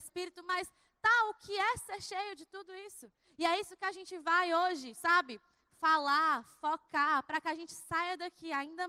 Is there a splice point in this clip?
no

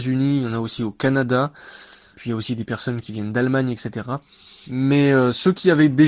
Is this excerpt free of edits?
yes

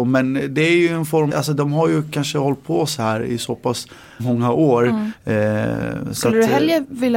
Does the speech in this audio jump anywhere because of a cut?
yes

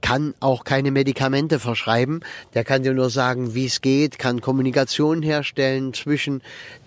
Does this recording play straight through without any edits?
yes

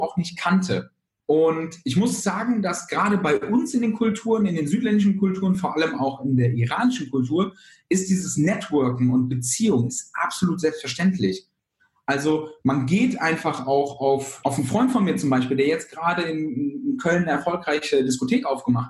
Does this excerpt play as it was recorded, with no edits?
yes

